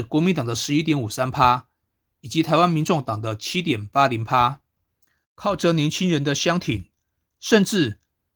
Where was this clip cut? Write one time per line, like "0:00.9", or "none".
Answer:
0:05.2
0:07.4